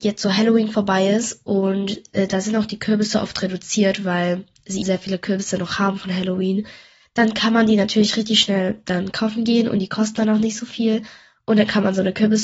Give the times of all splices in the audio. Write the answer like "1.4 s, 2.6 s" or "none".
4.8 s